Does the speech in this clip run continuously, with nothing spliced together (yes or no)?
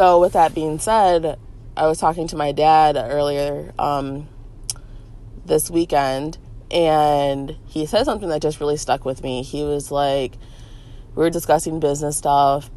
no